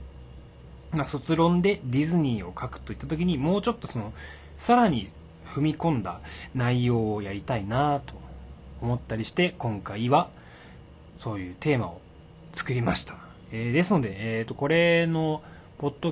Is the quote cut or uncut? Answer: uncut